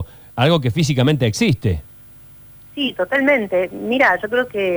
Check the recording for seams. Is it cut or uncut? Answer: uncut